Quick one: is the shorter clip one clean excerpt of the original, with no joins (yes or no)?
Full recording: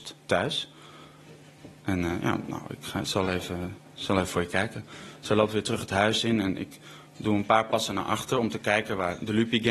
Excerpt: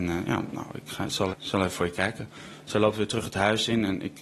no